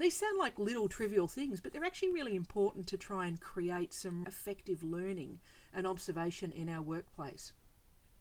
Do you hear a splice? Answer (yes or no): yes